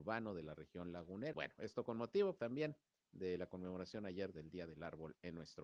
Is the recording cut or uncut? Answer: cut